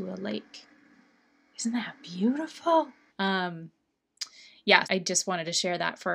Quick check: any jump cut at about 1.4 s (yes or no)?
no